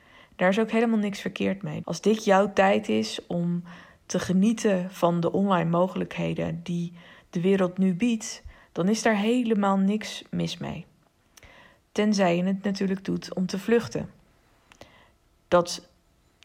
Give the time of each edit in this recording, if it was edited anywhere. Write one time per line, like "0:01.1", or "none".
0:01.8